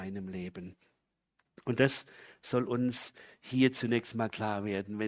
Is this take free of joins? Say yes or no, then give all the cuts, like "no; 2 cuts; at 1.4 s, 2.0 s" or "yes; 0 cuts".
yes; 0 cuts